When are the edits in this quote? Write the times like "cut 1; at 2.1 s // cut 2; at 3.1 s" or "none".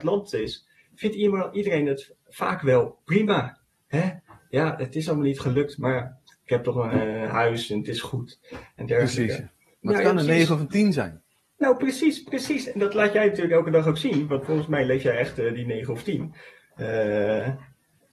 cut 1; at 9.7 s